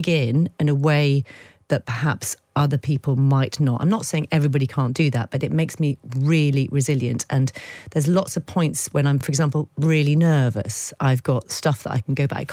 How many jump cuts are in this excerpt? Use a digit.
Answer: 0